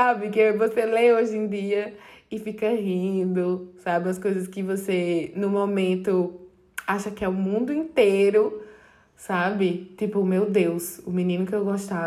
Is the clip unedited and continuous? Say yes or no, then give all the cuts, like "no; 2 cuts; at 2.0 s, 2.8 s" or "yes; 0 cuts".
yes; 0 cuts